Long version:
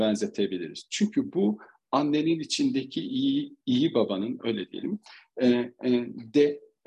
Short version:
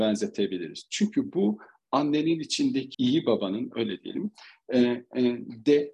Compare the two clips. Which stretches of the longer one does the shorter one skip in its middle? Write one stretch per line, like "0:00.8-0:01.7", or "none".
0:02.9-0:03.6